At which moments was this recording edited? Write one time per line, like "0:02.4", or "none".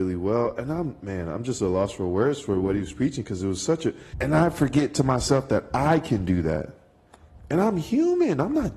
0:04.1